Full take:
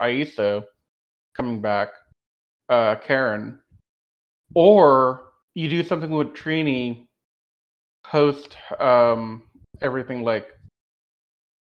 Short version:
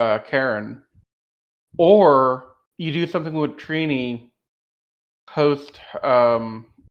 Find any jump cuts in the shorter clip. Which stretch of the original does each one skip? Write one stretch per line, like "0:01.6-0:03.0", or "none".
none